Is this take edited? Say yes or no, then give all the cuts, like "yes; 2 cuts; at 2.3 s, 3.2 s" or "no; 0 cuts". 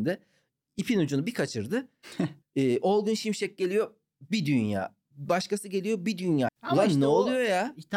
yes; 2 cuts; at 2.4 s, 6.5 s